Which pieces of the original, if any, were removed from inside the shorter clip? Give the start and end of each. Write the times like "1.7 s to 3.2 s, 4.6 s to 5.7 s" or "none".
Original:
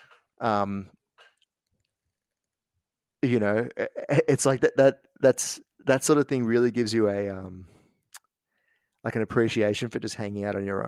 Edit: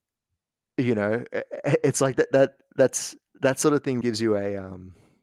6.5 s to 6.7 s